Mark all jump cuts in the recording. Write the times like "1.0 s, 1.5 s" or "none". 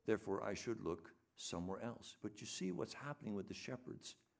2.2 s